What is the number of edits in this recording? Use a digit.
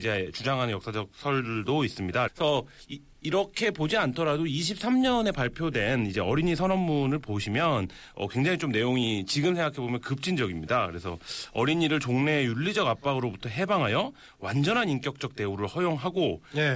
1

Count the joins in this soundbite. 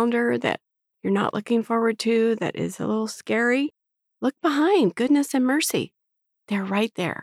1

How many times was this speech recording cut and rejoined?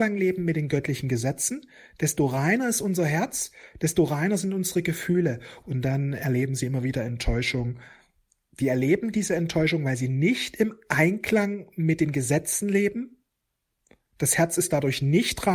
1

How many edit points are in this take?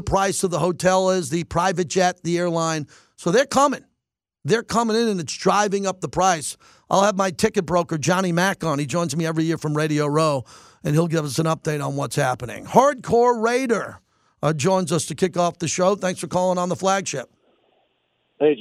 0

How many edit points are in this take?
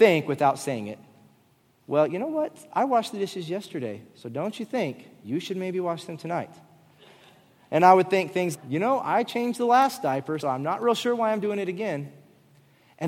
2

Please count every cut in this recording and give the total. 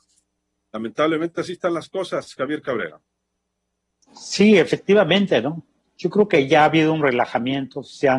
0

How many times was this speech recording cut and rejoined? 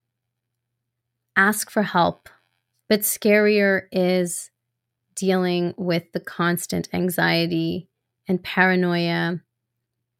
1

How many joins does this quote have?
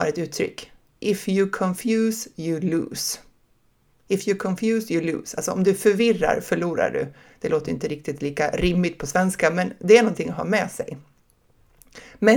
0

